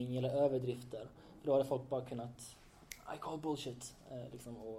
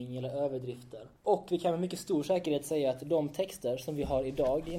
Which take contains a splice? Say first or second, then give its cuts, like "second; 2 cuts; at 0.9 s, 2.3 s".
second; 1 cut; at 1.2 s